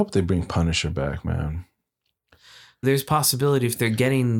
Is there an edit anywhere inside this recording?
yes; 1 cut; at 2.8 s

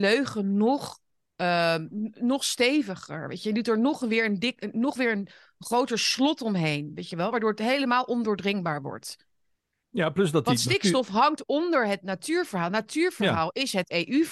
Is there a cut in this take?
no; 0 cuts

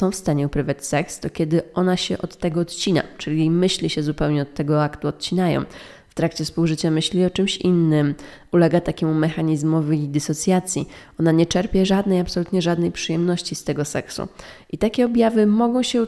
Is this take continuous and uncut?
yes; 0 cuts

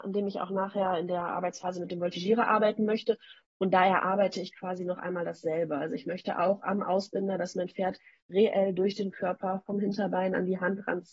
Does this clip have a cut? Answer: no; 0 cuts

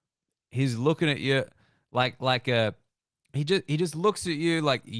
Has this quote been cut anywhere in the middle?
no; 0 cuts

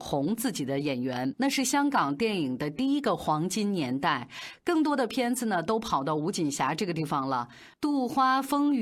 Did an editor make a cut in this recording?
yes; 1 cut; at 1.3 s

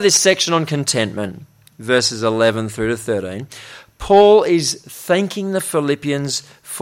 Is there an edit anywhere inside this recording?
no; 0 cuts

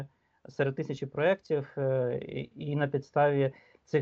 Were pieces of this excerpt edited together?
no; 0 cuts

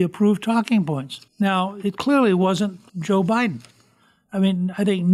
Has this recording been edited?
yes; 2 cuts; at 1.3 s, 2.9 s

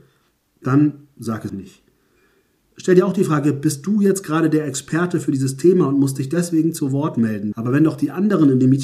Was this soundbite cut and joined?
yes; 2 cuts; at 1.5 s, 7.5 s

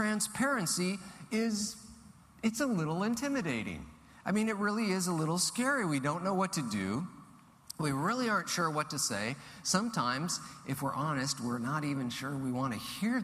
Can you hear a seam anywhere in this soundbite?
no; 0 cuts

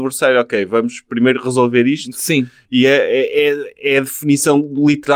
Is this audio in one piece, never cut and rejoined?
yes; 0 cuts

